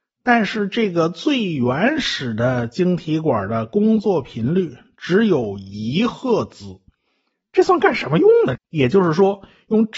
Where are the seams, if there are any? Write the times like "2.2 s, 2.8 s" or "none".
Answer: 8.5 s

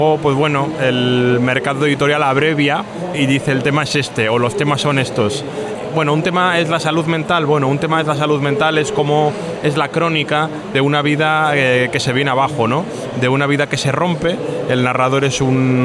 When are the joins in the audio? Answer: none

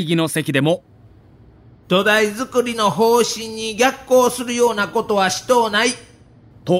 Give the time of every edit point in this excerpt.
none

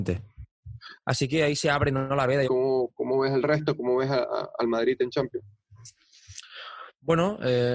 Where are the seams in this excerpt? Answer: 1.0 s, 2.4 s

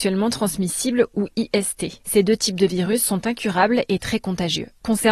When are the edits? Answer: none

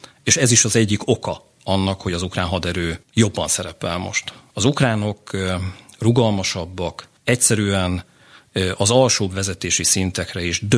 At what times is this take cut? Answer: 3.0 s, 7.2 s

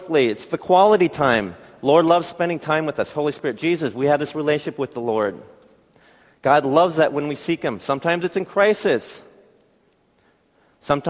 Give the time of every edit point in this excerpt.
none

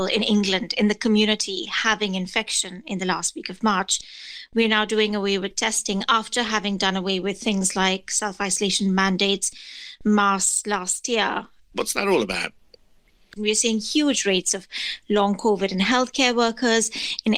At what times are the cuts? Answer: 11.7 s, 13.4 s

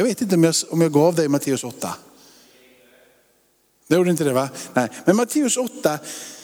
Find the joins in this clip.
none

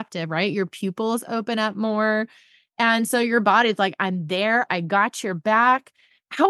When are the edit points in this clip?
4.7 s

